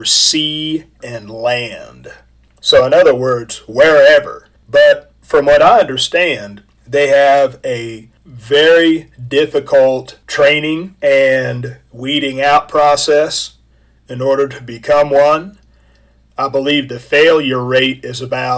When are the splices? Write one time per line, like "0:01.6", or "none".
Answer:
0:01.0
0:04.6